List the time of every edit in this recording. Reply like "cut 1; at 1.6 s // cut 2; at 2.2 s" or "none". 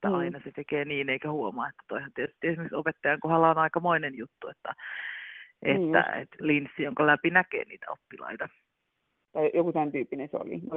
cut 1; at 6.4 s // cut 2; at 9.3 s